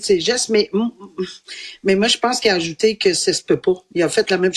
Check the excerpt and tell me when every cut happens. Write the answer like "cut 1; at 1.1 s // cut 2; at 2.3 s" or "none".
none